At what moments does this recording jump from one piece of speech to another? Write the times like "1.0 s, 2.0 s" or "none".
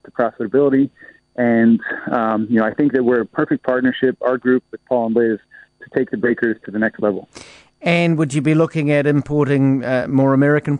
none